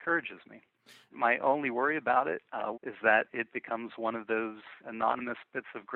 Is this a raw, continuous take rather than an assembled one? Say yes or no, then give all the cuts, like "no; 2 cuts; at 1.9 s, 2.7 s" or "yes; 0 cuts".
no; 3 cuts; at 1.1 s, 2.7 s, 4.8 s